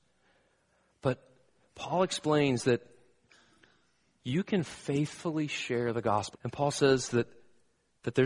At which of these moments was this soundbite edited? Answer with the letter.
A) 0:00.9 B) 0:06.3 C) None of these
B